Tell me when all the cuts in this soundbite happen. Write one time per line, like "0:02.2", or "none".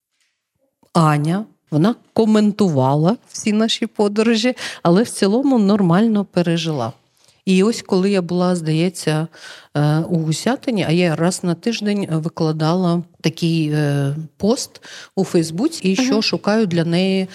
0:01.7
0:13.1
0:15.8